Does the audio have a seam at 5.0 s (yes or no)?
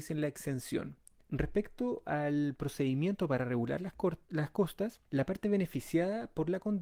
yes